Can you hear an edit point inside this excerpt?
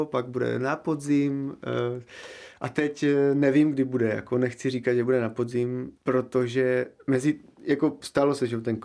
no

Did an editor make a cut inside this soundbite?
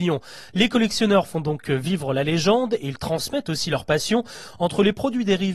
no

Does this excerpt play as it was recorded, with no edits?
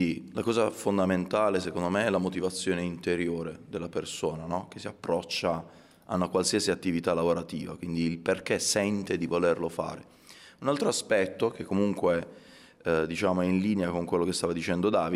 yes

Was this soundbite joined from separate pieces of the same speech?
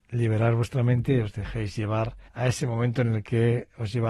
yes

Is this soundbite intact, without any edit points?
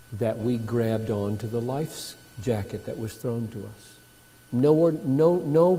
no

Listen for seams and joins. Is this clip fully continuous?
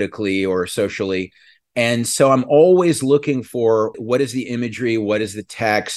yes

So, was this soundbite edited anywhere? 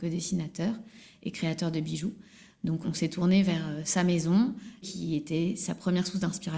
yes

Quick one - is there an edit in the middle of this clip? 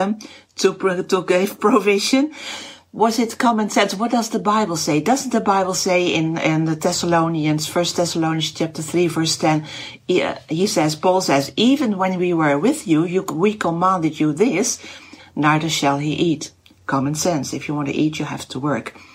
yes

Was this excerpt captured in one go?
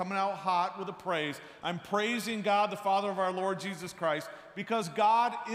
yes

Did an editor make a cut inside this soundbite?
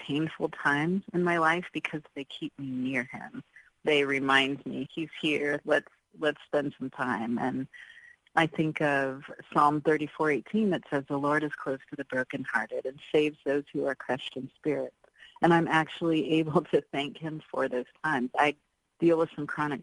yes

